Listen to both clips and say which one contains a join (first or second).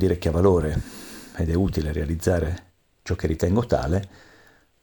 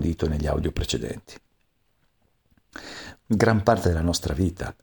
second